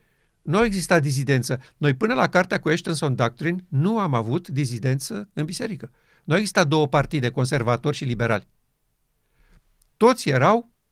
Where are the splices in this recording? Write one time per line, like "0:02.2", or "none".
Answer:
none